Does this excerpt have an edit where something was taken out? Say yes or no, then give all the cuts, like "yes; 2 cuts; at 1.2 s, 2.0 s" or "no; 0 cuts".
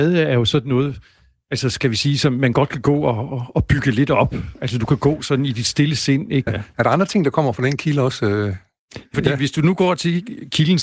yes; 2 cuts; at 6.5 s, 9.1 s